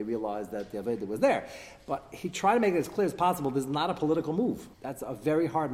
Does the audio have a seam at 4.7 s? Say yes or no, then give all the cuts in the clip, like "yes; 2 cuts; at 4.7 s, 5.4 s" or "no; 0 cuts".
yes; 1 cut; at 4.7 s